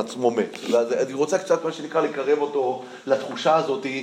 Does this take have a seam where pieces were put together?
no; 0 cuts

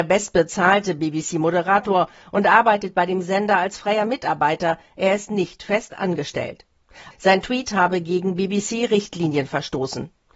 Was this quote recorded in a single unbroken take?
no; 1 cut; at 7.1 s

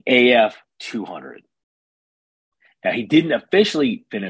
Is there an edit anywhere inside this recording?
yes; 1 cut; at 2.7 s

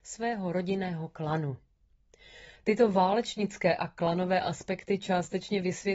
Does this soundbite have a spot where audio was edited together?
no; 0 cuts

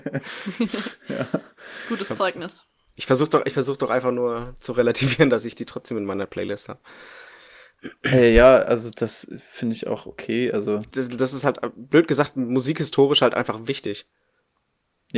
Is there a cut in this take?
yes; 1 cut; at 10.9 s

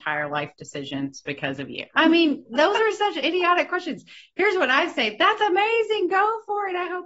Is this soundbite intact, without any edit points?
no; 1 cut; at 1.9 s

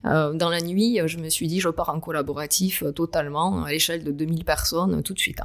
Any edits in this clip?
no; 0 cuts

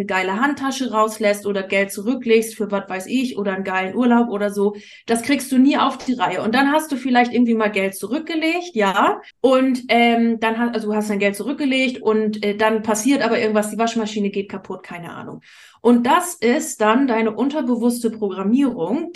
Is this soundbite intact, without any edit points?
no; 1 cut; at 9.3 s

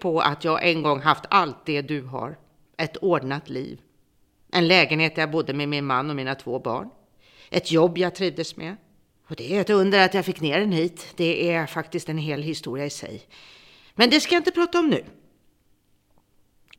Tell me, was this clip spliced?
yes; 1 cut; at 9.2 s

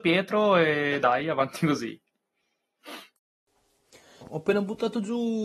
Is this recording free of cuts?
no; 1 cut; at 4.2 s

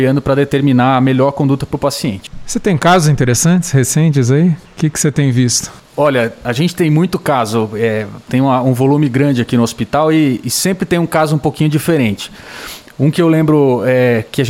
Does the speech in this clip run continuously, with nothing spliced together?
yes; 0 cuts

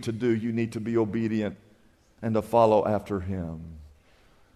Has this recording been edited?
no; 0 cuts

